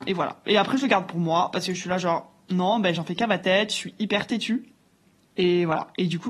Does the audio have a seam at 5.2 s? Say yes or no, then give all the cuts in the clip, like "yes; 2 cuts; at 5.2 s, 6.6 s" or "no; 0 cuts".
yes; 1 cut; at 5.2 s